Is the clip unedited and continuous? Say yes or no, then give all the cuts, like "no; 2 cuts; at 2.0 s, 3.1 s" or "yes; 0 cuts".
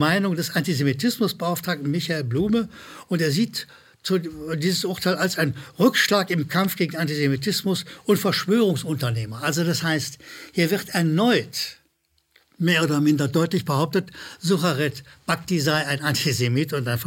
yes; 0 cuts